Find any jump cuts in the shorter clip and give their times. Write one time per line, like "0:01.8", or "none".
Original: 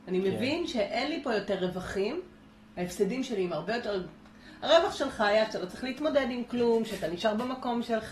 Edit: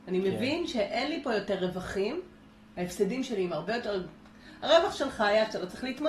none